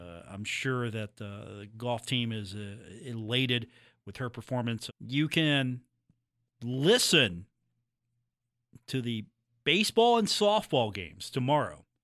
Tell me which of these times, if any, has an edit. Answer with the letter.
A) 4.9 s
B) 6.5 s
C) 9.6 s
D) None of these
A